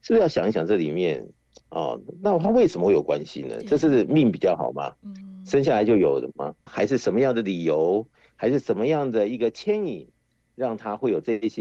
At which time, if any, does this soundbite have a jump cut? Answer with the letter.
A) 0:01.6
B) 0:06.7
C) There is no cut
B